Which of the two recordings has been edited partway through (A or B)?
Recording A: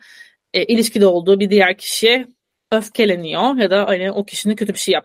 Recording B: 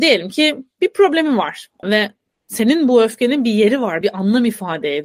B